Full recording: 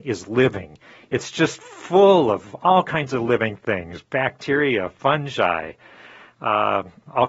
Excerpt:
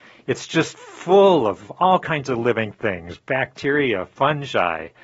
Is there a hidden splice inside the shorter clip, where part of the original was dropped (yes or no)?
no